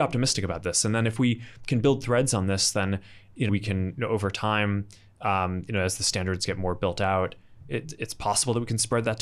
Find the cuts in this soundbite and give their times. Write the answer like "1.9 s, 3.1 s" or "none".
3.5 s